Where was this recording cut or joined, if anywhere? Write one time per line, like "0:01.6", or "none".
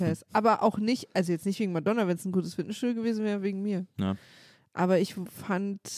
none